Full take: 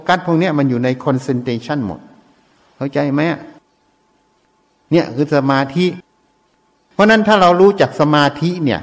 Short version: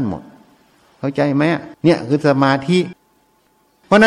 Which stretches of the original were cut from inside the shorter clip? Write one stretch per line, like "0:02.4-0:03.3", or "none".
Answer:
0:03.5-0:04.8